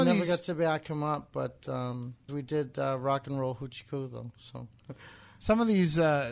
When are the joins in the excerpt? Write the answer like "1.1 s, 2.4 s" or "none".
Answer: 2.3 s